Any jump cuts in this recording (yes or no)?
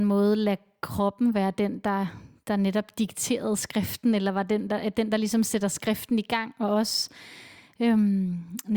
no